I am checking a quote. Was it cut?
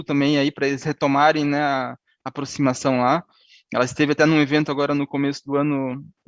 no; 0 cuts

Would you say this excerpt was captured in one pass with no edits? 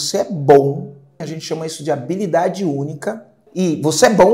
no; 1 cut; at 1.2 s

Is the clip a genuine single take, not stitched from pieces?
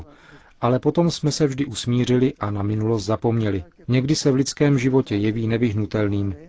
no; 1 cut; at 3.8 s

